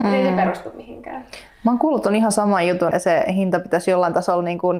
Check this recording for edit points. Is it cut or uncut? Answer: cut